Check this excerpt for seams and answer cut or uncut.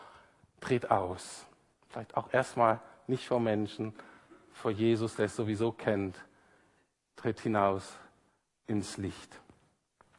uncut